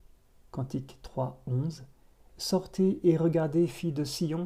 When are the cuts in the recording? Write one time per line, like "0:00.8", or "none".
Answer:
none